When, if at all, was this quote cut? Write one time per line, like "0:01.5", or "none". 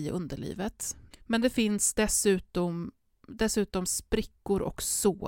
0:01.1